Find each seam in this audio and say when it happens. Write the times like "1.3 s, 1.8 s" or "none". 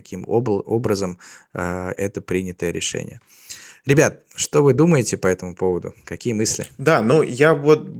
2.0 s